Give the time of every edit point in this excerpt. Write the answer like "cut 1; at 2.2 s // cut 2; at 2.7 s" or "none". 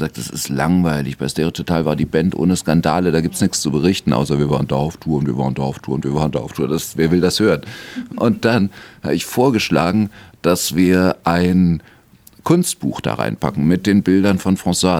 none